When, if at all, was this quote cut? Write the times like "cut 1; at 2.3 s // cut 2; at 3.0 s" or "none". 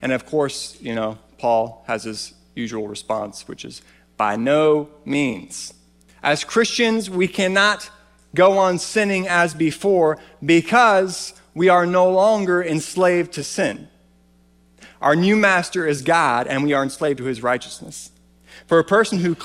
cut 1; at 6.1 s